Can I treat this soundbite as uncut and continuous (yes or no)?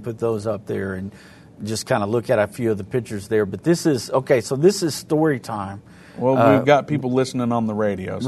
yes